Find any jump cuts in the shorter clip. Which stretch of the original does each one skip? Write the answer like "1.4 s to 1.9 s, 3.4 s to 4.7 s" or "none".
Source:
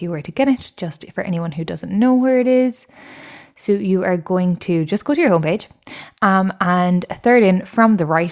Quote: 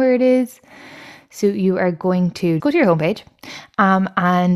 4.9 s to 5.0 s